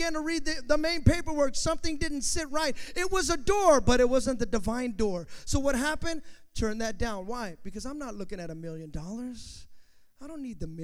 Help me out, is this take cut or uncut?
uncut